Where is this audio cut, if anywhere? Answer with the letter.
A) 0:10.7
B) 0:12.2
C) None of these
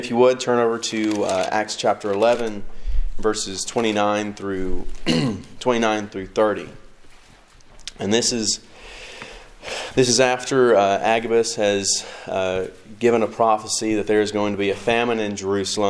C